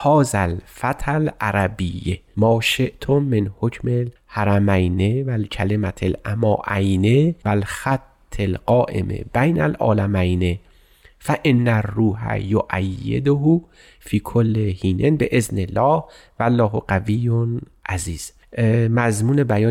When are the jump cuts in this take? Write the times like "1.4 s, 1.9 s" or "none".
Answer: none